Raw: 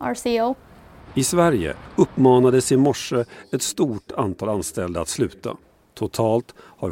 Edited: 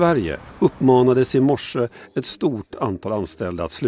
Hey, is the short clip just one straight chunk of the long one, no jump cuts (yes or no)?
yes